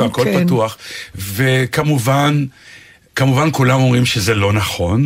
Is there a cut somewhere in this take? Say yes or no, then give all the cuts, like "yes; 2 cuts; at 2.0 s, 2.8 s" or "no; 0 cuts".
yes; 1 cut; at 3.1 s